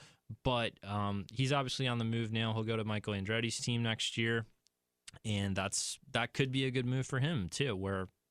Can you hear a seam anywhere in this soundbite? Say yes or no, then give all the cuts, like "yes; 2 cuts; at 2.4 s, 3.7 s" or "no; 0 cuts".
no; 0 cuts